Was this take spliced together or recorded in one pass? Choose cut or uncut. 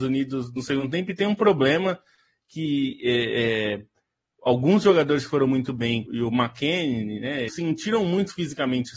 cut